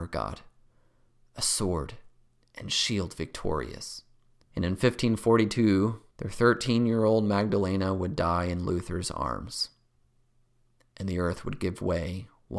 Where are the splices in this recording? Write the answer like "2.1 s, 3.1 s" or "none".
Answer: 4.4 s, 6.1 s